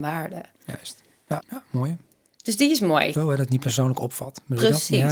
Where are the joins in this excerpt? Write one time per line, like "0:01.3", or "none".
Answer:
0:01.4
0:03.1